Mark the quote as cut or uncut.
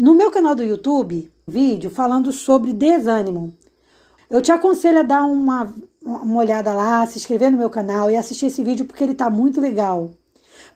cut